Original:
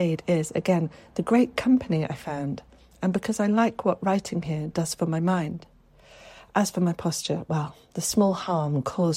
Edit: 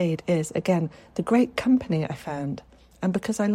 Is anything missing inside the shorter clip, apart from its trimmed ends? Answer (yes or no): no